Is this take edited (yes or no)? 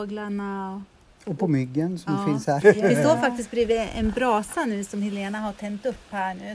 yes